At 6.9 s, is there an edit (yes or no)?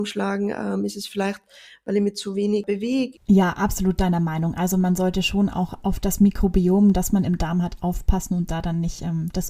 no